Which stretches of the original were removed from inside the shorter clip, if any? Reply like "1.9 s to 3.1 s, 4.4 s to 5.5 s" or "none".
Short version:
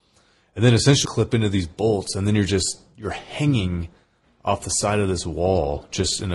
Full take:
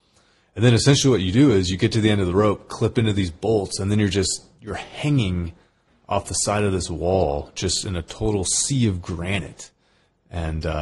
1.0 s to 2.7 s